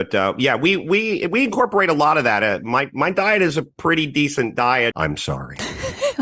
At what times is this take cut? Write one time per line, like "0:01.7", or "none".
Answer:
0:04.9